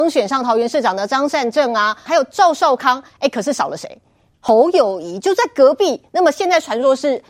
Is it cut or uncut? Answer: cut